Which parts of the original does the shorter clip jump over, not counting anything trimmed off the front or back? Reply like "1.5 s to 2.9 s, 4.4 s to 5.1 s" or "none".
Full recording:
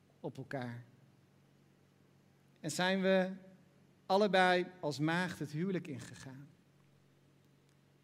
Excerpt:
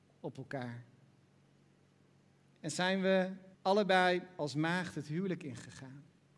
3.5 s to 4.0 s